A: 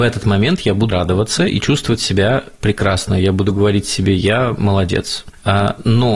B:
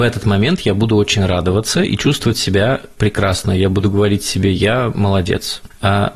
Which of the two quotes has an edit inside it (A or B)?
A